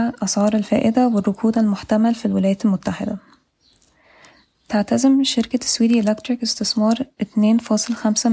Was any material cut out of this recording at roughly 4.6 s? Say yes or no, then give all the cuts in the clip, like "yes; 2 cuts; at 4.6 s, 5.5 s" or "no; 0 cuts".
no; 0 cuts